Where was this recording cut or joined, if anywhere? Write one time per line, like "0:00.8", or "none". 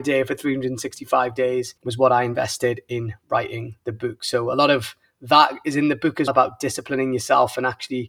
0:01.8
0:06.3

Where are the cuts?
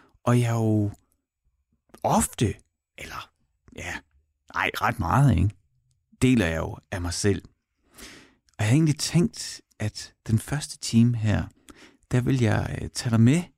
none

